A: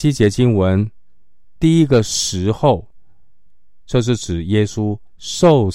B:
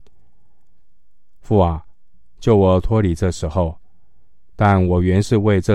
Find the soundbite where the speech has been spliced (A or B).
B